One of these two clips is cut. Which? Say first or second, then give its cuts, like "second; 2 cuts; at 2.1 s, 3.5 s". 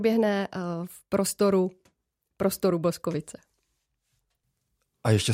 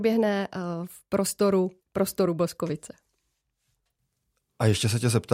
second; 1 cut; at 1.8 s